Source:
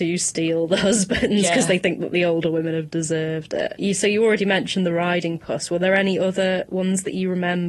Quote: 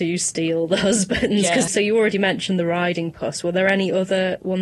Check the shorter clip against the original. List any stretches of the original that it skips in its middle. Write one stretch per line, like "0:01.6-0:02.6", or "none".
0:01.7-0:03.9